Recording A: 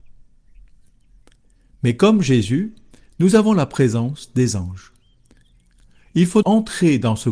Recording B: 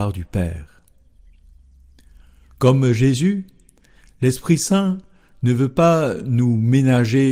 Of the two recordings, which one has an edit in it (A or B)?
A